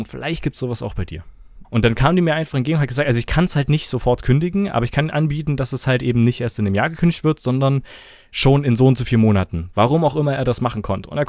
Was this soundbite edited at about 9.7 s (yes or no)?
no